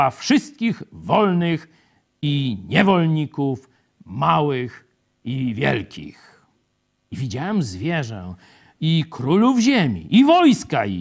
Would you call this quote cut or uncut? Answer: uncut